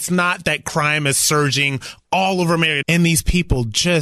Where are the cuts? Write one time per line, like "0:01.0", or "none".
0:02.8